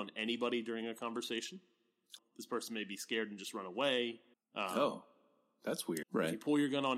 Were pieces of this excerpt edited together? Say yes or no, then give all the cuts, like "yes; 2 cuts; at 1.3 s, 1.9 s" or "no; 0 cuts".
yes; 3 cuts; at 2.2 s, 4.3 s, 6.0 s